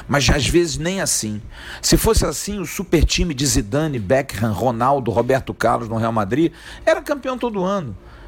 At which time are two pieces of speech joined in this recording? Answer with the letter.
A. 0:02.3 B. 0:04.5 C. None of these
C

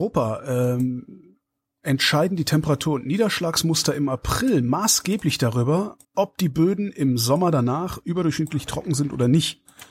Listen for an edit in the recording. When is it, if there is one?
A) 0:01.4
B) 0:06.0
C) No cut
B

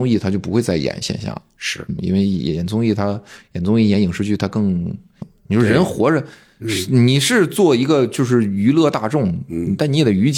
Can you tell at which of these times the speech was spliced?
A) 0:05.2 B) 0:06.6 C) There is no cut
A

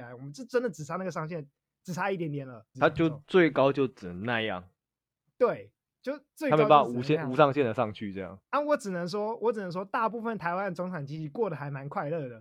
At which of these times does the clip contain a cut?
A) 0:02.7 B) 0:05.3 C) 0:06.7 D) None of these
A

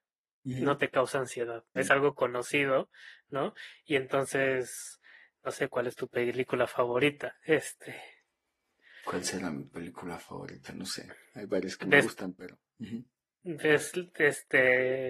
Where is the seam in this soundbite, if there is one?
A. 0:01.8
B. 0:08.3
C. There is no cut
A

